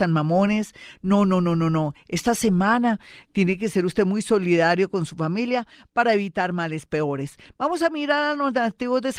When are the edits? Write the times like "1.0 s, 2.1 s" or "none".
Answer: none